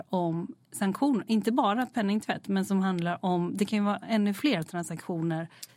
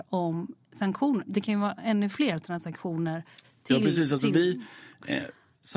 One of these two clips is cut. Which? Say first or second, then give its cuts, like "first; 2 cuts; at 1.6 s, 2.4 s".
second; 1 cut; at 1.3 s